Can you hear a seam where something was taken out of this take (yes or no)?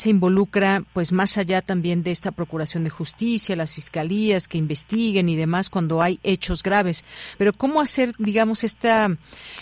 no